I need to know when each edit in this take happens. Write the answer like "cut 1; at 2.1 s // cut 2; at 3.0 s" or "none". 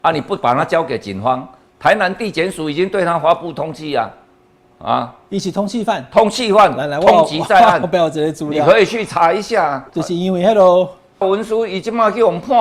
cut 1; at 9.9 s // cut 2; at 11.2 s